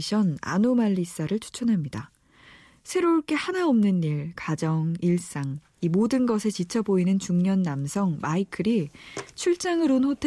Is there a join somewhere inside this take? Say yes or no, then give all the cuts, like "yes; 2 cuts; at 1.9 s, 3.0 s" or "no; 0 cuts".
no; 0 cuts